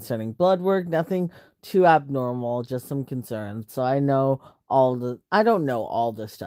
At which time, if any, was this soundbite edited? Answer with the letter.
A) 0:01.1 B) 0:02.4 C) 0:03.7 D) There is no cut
C